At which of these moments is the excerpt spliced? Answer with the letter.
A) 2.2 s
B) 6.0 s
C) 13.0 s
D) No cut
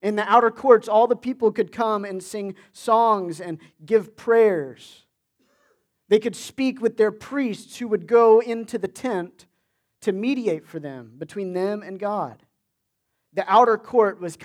D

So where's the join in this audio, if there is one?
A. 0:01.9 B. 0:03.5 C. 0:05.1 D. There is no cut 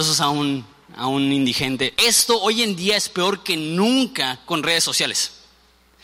A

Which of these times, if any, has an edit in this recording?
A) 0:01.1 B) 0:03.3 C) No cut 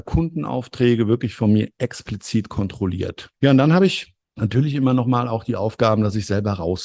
B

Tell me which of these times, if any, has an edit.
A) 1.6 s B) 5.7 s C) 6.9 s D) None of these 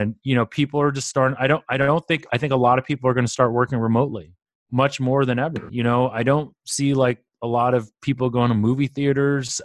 B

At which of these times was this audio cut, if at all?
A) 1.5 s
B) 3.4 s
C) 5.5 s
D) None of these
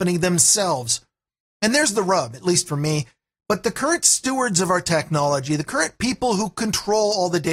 B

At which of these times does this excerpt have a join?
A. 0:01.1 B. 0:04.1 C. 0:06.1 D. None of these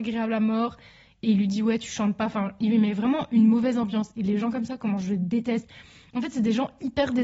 D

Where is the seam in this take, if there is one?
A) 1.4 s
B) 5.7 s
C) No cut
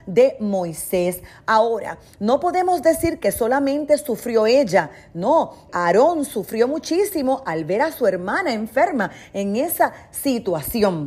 B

